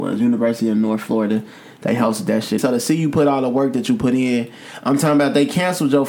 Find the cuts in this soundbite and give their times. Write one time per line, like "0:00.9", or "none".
0:02.6